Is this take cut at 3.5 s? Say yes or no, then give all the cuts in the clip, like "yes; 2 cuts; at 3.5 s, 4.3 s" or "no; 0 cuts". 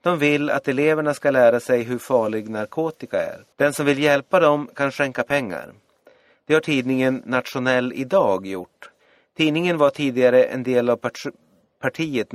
yes; 1 cut; at 3.5 s